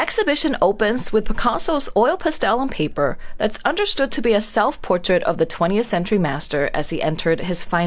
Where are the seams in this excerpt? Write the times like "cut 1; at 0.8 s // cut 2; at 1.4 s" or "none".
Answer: none